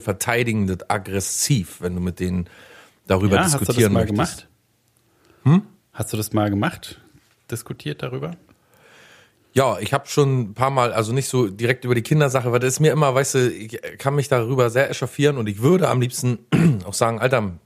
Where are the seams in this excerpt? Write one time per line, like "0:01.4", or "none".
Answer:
none